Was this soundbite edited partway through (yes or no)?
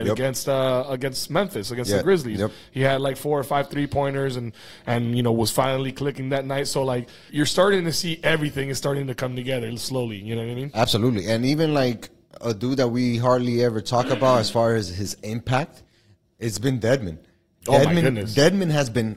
yes